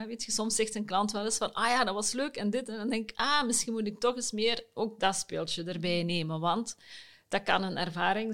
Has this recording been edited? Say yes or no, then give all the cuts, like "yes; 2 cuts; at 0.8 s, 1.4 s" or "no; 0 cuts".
no; 0 cuts